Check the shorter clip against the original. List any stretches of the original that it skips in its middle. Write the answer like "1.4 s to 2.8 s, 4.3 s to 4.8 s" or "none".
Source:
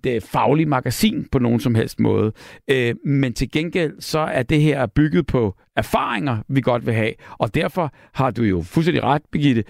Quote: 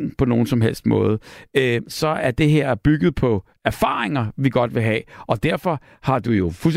3.0 s to 4.0 s